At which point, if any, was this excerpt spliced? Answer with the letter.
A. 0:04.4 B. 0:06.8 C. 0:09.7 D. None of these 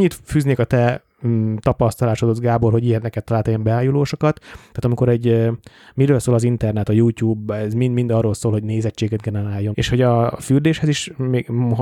C